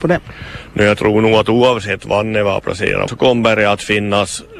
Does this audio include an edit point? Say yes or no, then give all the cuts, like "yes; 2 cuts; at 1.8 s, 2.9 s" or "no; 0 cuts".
yes; 1 cut; at 3.1 s